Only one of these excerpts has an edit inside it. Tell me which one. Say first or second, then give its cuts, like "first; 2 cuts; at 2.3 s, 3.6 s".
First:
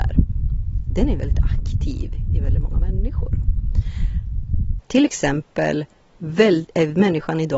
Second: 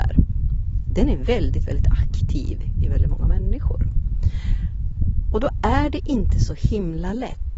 first; 2 cuts; at 1.2 s, 4.8 s